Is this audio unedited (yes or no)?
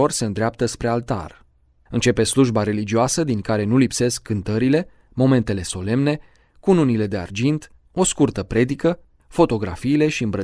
yes